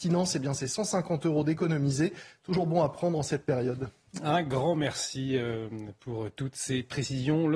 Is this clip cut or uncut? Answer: uncut